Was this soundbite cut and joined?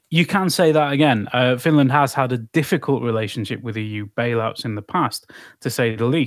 no; 0 cuts

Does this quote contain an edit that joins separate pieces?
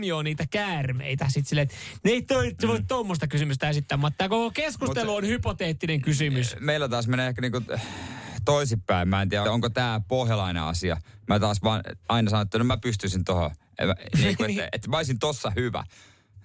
yes; 1 cut; at 9.4 s

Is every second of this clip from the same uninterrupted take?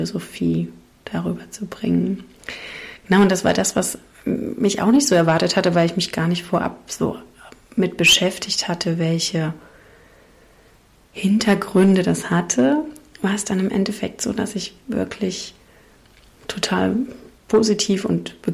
no; 1 cut; at 17.4 s

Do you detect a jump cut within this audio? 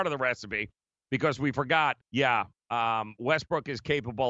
yes; 1 cut; at 2.0 s

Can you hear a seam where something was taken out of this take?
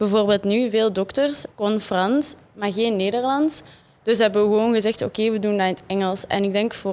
yes; 1 cut; at 1.5 s

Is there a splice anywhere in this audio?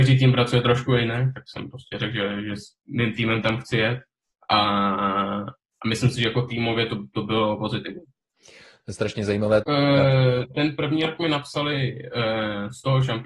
yes; 1 cut; at 9.6 s

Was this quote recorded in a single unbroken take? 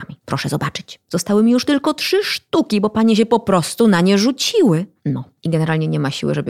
yes; 0 cuts

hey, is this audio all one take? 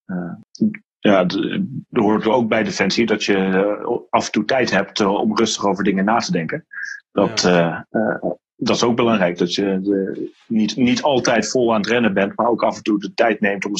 yes; 0 cuts

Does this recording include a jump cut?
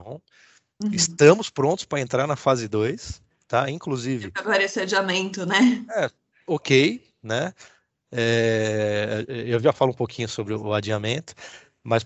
no; 0 cuts

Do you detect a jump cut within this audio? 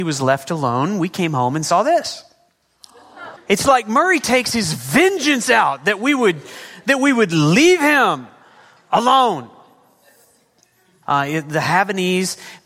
yes; 2 cuts; at 3.4 s, 11.0 s

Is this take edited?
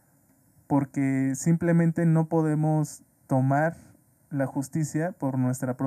no; 0 cuts

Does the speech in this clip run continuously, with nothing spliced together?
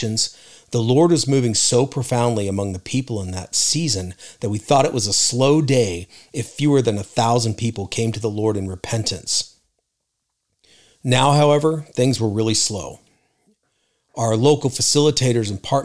yes; 0 cuts

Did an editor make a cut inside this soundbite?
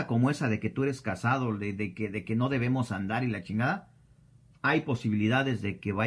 no; 0 cuts

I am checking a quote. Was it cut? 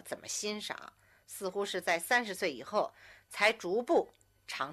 no; 0 cuts

